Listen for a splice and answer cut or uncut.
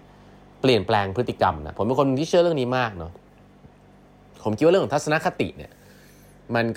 uncut